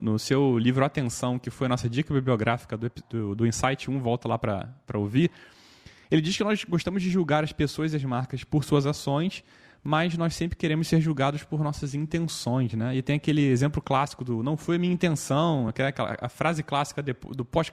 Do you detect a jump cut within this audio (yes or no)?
no